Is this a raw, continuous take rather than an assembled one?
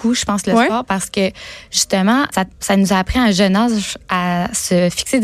no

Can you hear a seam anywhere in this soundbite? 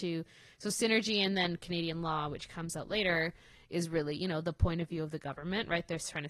no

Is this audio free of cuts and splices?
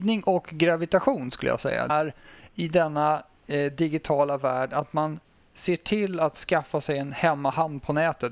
no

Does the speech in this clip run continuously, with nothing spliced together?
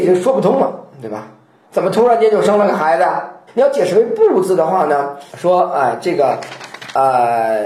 no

